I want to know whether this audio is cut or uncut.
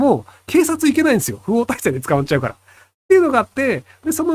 uncut